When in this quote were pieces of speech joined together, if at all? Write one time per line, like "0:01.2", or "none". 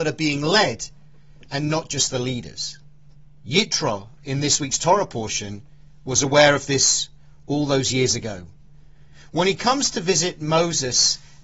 none